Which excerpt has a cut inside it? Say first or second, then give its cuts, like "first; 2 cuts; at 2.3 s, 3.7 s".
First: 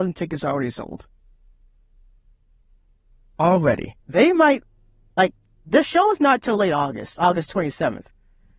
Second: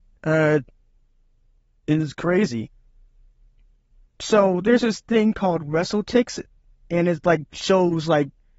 first; 1 cut; at 4.0 s